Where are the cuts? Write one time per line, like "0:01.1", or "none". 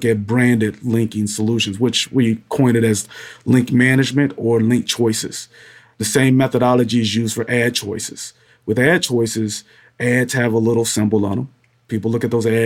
none